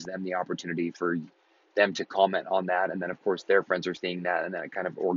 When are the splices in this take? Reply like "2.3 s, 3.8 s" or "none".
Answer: none